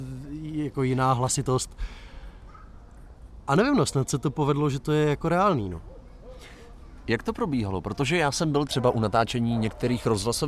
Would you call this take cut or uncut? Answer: uncut